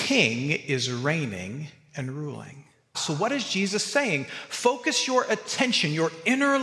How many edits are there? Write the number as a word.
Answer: one